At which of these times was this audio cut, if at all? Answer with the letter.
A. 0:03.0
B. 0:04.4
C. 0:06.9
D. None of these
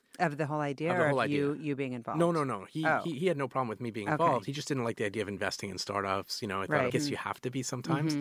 C